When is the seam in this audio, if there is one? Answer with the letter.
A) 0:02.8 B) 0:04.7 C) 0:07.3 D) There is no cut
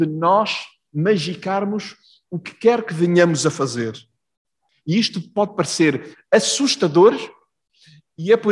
B